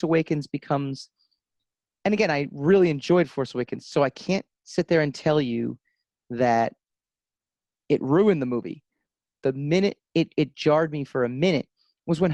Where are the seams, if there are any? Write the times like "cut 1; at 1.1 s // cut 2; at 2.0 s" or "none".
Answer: cut 1; at 9.4 s